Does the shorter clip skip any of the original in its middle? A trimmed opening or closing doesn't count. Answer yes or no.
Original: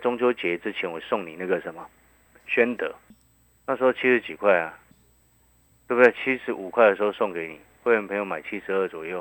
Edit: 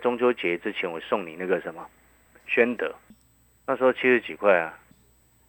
no